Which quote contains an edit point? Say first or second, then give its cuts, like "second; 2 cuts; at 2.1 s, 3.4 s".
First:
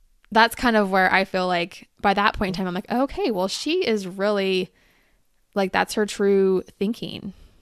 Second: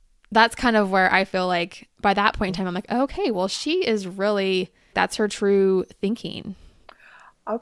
second; 1 cut; at 4.9 s